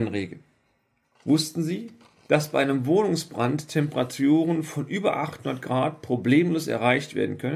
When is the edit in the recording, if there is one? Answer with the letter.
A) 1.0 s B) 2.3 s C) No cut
A